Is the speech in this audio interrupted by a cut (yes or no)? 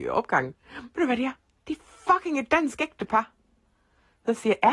no